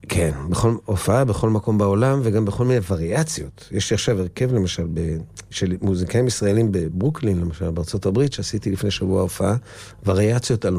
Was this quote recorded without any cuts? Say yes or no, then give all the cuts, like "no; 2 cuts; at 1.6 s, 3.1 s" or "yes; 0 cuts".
yes; 0 cuts